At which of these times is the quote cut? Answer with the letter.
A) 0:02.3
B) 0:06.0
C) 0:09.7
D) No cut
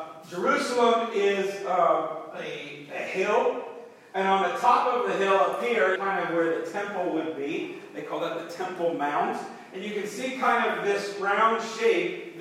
B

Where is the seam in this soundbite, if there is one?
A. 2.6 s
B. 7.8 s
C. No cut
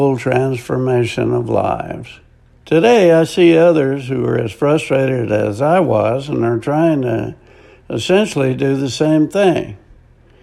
A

